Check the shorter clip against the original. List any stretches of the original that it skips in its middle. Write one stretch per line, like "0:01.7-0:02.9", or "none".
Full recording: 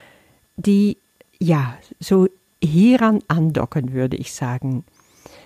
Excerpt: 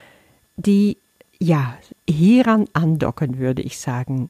0:01.9-0:02.5